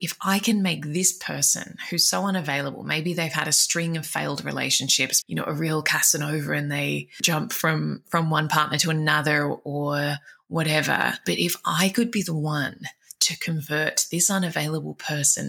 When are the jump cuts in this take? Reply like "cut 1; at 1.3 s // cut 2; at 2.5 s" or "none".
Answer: cut 1; at 5.2 s